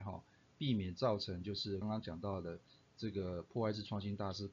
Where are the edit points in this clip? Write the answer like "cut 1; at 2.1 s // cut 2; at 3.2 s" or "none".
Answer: cut 1; at 1.8 s